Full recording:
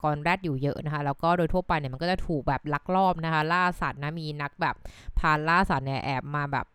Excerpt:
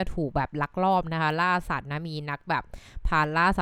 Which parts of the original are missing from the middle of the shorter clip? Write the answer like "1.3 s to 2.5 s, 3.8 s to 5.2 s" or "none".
none